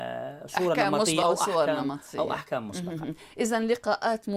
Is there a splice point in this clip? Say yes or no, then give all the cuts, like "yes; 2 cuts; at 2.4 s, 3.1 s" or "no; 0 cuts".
yes; 1 cut; at 1.2 s